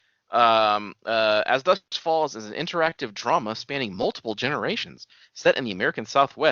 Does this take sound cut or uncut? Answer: uncut